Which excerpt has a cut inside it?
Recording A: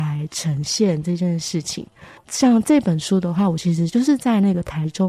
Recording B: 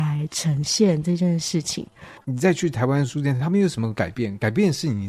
B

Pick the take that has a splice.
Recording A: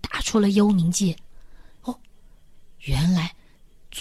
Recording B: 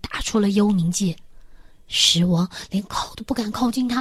A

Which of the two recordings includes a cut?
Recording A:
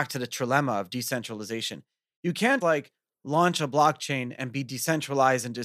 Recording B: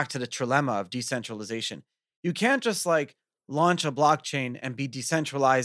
A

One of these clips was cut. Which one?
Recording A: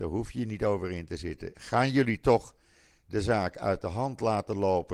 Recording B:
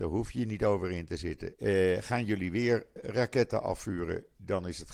B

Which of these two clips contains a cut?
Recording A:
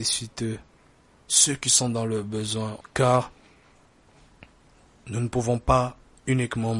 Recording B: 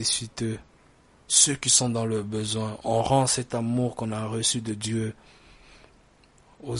A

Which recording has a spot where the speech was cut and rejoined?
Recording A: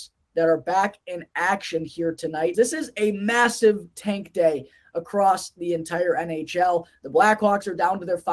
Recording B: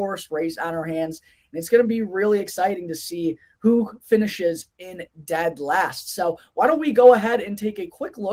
A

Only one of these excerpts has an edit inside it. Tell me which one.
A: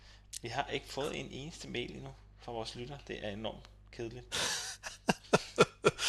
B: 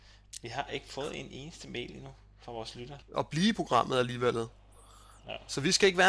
B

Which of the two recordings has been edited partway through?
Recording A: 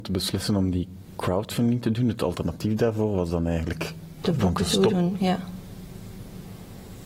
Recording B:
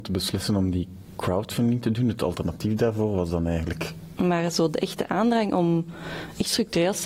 B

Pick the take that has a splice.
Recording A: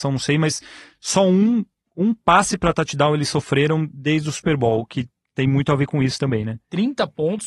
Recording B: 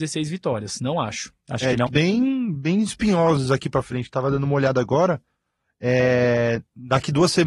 B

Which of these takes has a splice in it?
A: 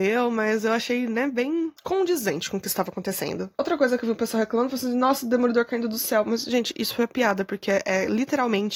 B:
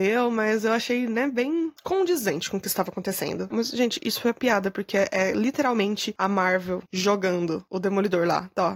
B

